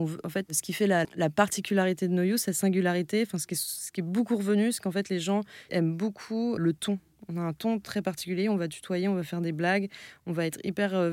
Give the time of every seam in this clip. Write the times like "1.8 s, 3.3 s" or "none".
1.0 s, 6.6 s